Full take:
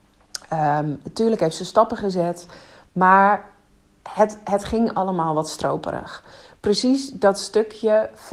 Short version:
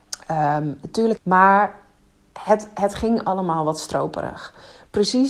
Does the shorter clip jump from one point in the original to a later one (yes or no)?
yes